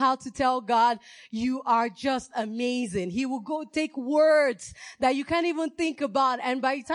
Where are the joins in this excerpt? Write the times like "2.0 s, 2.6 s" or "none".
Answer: none